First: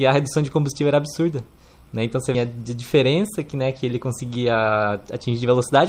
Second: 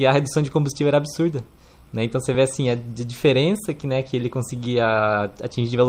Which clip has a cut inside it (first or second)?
first